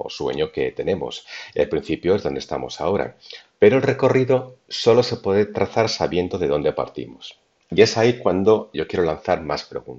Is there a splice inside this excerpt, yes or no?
yes